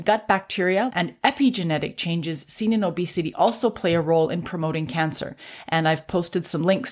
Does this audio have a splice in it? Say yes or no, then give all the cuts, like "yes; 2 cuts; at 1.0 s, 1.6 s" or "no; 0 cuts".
yes; 1 cut; at 0.9 s